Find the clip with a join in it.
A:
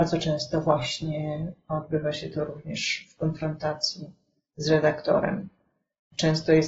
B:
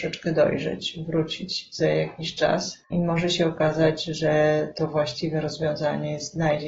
B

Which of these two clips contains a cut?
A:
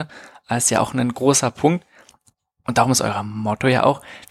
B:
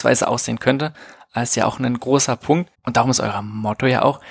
B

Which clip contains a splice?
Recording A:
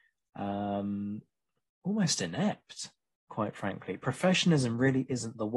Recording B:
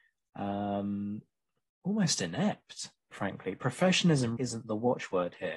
B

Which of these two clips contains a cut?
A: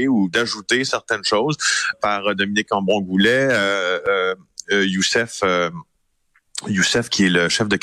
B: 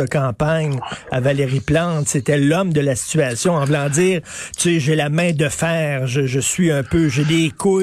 A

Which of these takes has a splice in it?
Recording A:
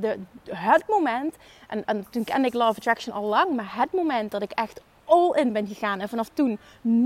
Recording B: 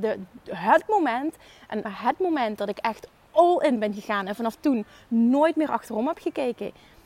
B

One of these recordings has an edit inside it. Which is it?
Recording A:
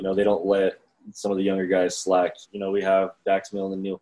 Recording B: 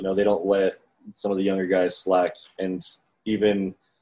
A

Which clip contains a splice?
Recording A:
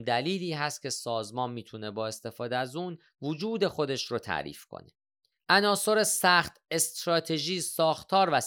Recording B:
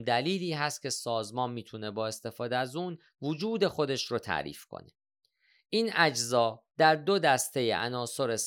A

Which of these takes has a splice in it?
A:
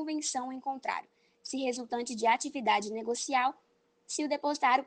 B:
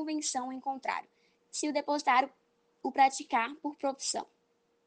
B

